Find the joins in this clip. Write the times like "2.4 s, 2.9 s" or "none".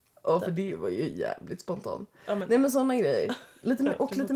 none